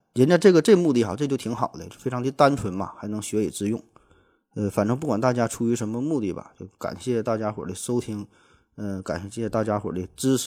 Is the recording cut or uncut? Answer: uncut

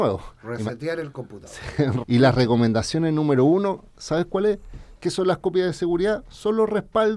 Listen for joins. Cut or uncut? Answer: cut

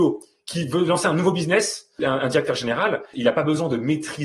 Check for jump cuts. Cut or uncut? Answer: cut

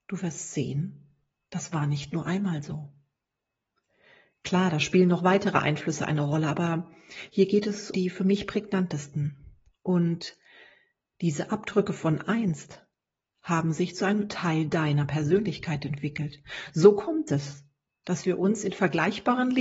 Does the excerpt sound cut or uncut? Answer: cut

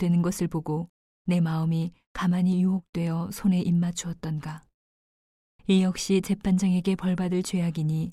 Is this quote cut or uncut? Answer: uncut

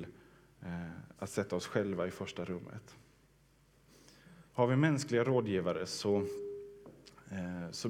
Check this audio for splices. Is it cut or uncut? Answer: cut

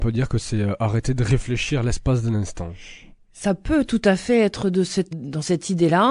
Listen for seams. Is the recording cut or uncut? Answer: cut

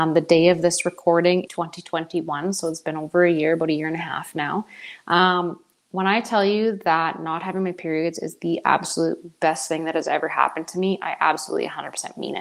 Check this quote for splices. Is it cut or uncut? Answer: cut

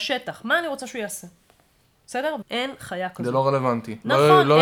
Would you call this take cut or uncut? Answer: cut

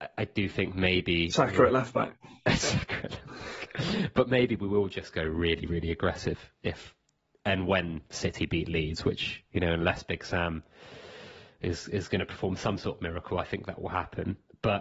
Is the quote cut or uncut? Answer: uncut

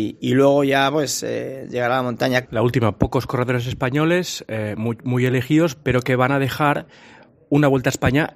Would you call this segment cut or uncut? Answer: cut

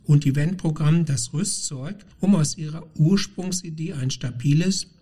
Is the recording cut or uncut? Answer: uncut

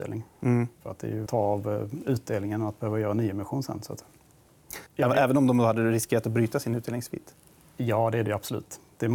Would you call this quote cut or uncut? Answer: cut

